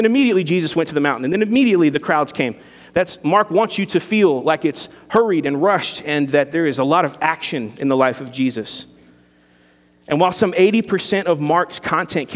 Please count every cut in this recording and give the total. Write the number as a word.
zero